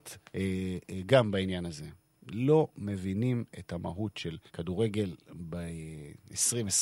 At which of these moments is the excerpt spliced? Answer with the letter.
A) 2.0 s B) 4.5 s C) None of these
B